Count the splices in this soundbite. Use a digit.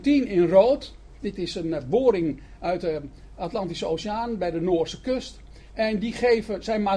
2